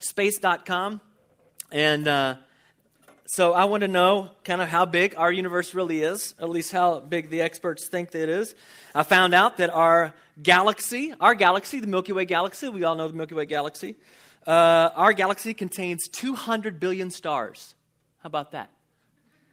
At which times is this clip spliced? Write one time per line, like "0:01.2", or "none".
none